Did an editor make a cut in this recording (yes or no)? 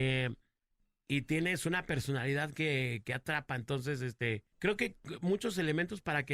yes